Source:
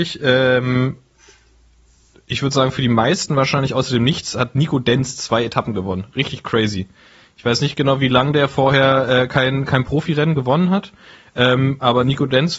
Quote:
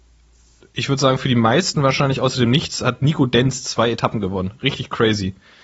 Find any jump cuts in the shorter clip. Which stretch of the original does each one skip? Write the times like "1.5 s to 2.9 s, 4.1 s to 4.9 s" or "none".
none